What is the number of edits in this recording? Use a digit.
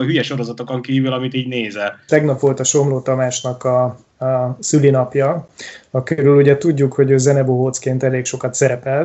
1